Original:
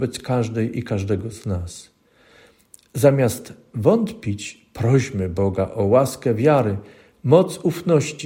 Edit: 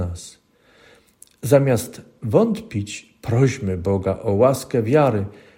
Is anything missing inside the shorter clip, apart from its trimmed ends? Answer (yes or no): no